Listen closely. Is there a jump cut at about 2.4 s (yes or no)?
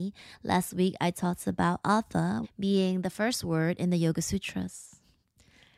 yes